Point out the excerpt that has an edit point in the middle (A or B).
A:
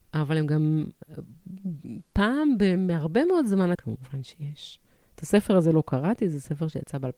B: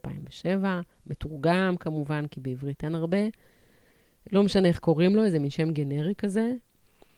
A